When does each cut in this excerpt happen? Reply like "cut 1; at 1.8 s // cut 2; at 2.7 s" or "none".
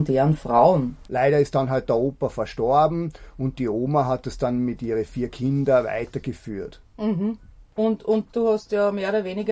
cut 1; at 1.1 s // cut 2; at 8.3 s